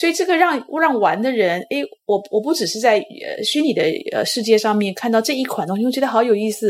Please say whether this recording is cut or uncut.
uncut